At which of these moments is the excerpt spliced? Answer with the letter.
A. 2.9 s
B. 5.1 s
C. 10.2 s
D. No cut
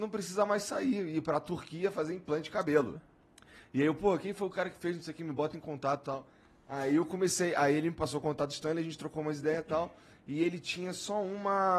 A